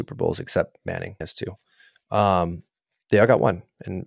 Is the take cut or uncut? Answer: cut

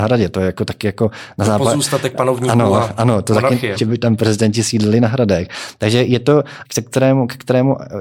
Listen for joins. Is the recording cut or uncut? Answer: cut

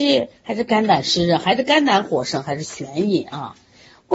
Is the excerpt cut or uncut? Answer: uncut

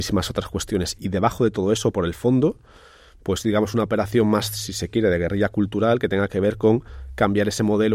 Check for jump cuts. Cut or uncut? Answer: uncut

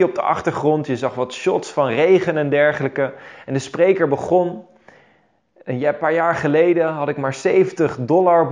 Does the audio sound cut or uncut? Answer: uncut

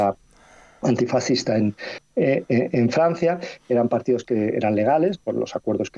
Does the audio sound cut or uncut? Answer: uncut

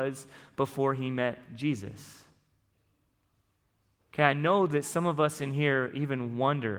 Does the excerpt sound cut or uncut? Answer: uncut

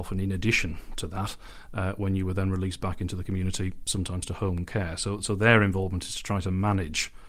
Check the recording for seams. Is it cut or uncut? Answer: uncut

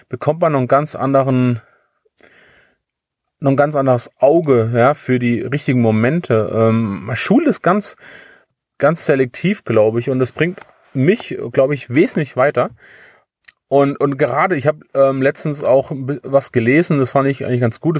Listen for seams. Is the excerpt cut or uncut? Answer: uncut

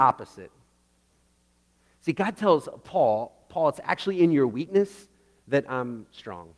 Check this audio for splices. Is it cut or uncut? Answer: uncut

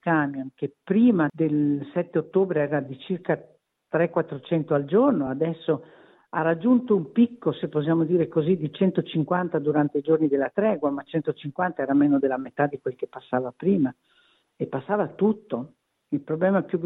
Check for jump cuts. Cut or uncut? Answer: uncut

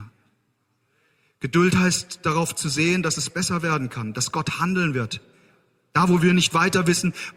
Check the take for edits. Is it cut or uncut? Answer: uncut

